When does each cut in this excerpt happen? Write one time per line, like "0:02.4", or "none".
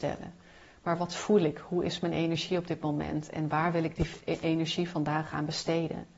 none